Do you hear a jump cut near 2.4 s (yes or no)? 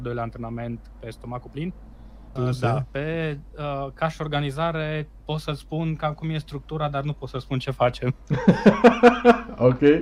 yes